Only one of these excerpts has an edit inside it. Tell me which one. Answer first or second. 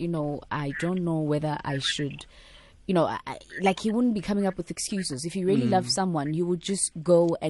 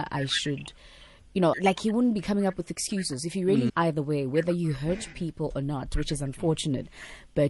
second